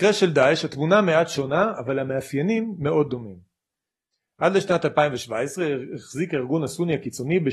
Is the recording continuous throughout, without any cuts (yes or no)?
yes